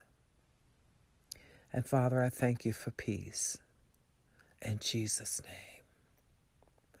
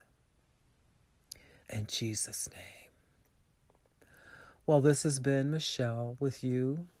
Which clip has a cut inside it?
second; 1 cut; at 1.6 s

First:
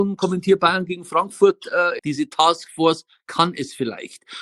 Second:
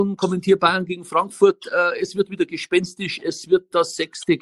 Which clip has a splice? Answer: first; 1 cut; at 2.0 s

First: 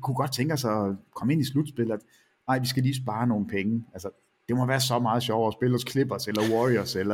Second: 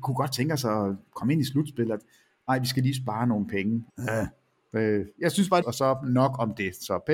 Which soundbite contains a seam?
second; 2 cuts; at 3.9 s, 5.6 s

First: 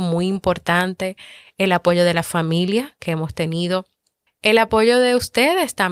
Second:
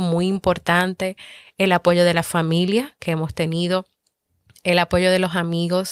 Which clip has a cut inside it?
first; 1 cut; at 4.3 s

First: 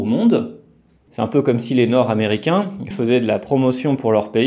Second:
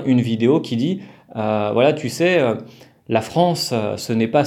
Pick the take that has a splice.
first; 2 cuts; at 1.1 s, 2.9 s

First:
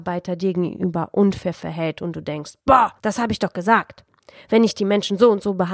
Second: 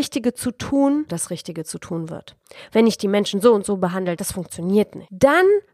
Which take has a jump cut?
second; 3 cuts; at 1.1 s, 2.7 s, 4.2 s

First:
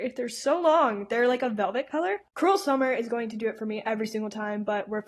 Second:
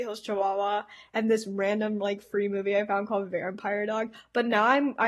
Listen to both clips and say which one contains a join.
first; 1 cut; at 2.2 s

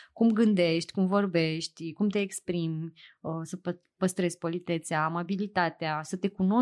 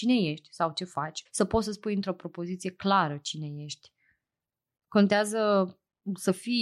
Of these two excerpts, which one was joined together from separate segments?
second; 2 cuts; at 1.3 s, 4.8 s

